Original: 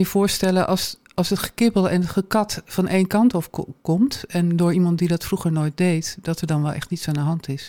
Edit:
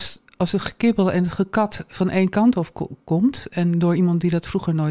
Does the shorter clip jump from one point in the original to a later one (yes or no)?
no